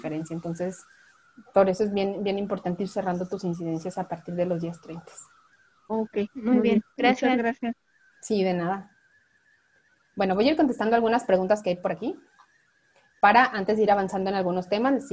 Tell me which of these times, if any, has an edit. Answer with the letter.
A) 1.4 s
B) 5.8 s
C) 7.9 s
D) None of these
D